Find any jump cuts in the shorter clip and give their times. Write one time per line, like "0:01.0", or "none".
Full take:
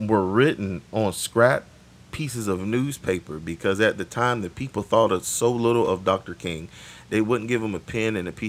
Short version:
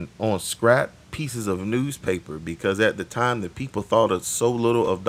0:01.0